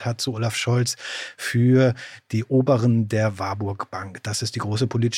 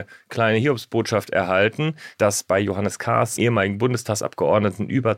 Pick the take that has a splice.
second; 1 cut; at 3.4 s

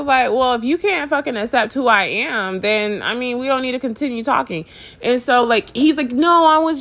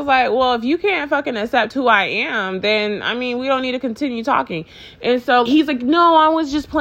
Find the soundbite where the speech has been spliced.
second; 1 cut; at 5.4 s

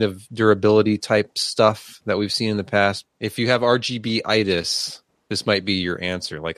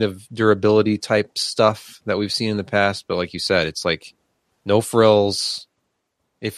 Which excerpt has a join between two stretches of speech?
first; 1 cut; at 3.1 s

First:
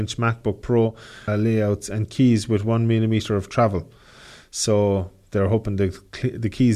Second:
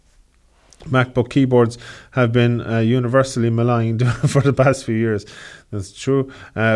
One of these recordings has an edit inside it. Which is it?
first; 1 cut; at 1.3 s

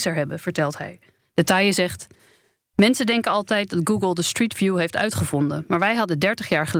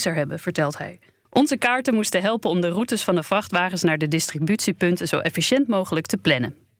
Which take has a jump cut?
first; 1 cut; at 1.2 s

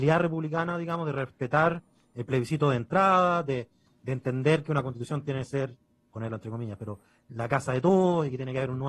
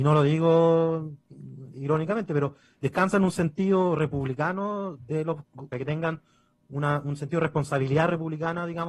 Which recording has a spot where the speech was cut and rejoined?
second; 2 cuts; at 1.7 s, 5.7 s

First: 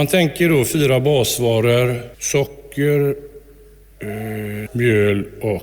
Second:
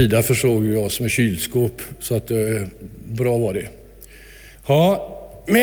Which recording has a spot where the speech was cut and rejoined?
first; 2 cuts; at 2.1 s, 4.7 s

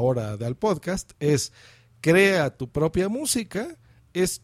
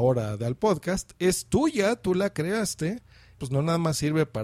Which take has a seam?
second; 2 cuts; at 1.1 s, 3.4 s

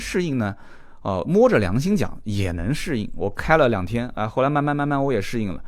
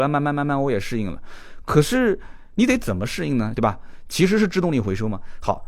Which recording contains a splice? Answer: second; 1 cut; at 3.5 s

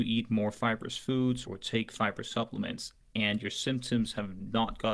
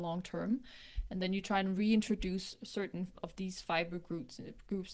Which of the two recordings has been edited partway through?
first; 1 cut; at 1.4 s

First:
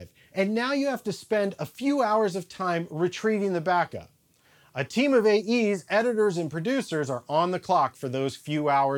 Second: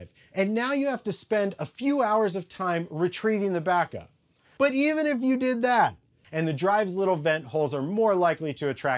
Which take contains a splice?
second; 2 cuts; at 4.6 s, 6.2 s

